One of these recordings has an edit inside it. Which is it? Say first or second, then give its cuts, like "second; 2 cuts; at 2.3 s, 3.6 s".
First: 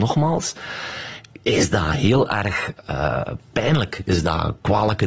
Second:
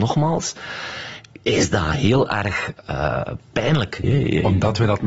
second; 1 cut; at 4.0 s